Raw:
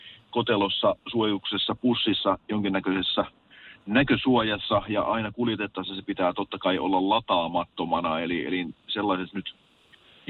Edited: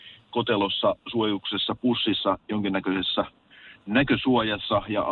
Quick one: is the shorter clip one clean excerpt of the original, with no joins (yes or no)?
yes